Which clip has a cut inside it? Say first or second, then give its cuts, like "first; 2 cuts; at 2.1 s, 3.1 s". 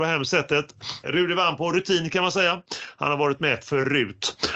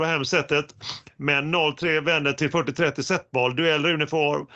first; 1 cut; at 1.0 s